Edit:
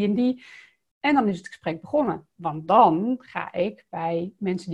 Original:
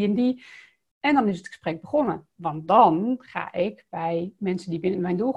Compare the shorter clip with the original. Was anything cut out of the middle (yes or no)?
no